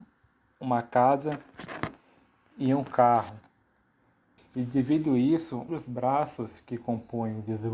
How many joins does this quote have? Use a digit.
2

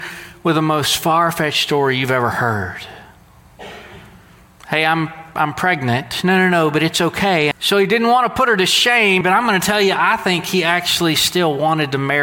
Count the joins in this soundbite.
2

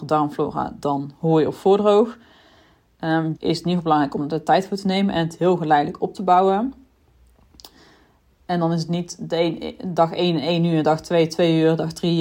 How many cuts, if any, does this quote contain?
1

